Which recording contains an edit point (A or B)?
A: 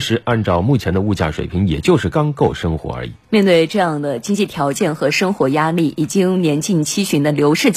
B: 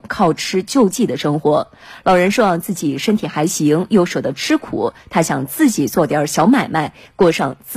A